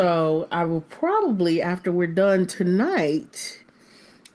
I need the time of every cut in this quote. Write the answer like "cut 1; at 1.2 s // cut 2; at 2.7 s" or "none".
none